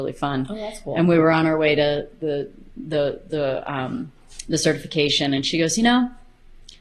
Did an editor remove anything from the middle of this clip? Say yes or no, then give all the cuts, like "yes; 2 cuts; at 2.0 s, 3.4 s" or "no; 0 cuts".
no; 0 cuts